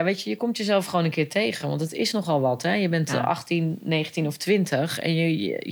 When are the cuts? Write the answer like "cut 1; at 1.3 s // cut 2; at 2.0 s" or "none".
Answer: none